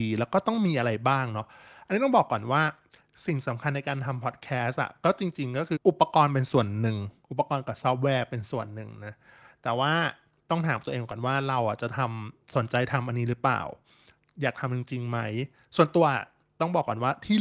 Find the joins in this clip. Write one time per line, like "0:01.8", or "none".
0:05.8